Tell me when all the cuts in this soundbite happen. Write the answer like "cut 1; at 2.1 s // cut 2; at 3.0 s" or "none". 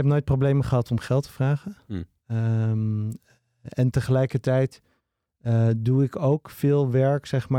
none